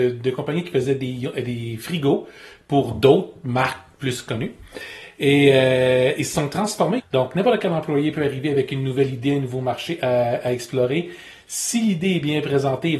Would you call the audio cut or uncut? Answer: cut